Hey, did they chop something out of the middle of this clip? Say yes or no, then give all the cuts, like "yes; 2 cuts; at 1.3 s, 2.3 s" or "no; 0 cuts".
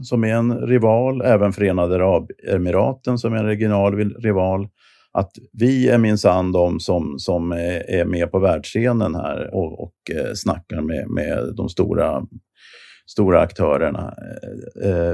yes; 1 cut; at 9.5 s